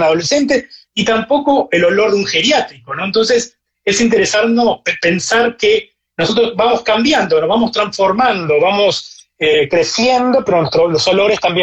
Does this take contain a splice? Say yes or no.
no